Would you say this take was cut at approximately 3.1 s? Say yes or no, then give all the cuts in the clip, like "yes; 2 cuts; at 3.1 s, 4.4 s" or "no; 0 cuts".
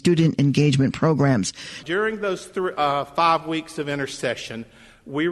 no; 1 cut; at 1.8 s